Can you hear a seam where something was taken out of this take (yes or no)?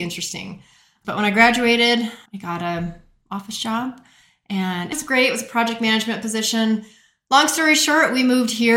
yes